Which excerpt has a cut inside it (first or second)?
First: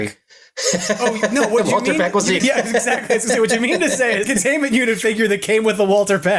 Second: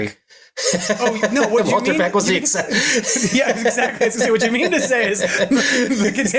first